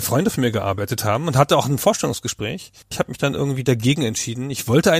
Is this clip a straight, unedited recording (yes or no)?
no